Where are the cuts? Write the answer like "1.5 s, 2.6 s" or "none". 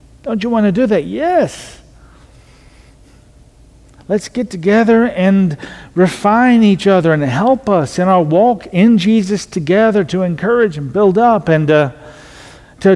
4.0 s